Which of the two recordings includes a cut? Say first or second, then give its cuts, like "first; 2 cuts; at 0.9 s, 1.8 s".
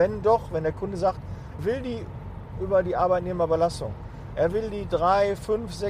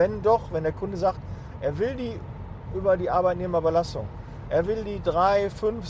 first; 1 cut; at 1.6 s